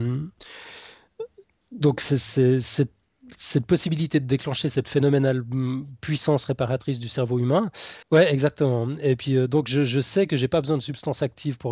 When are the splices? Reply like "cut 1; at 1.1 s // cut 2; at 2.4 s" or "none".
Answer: cut 1; at 8.0 s